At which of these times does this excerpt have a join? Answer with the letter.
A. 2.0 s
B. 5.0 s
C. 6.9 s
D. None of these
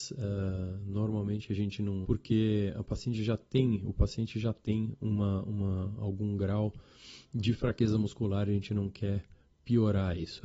A